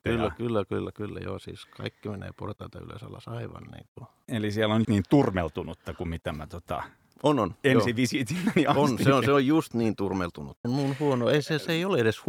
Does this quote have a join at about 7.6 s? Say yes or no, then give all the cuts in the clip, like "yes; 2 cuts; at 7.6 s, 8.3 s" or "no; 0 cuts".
no; 2 cuts; at 4.8 s, 10.6 s